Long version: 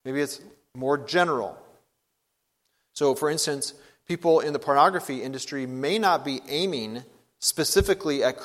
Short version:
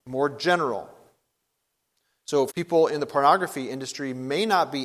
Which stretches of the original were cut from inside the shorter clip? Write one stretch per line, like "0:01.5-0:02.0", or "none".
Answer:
0:03.2-0:04.0

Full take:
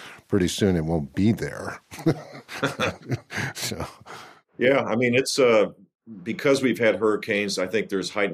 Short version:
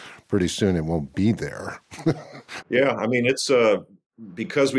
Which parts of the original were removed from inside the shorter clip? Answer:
0:02.6-0:04.5

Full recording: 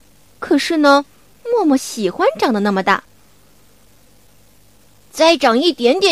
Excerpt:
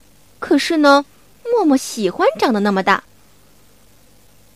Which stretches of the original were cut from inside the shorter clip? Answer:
none

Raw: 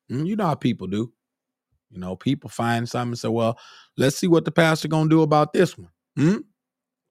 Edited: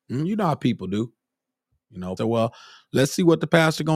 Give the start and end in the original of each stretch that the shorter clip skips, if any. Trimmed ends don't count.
0:02.2-0:03.2

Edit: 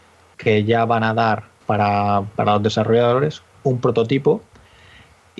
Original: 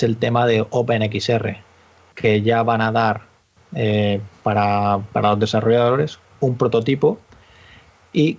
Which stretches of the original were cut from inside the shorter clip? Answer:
0:03.4-0:04.4

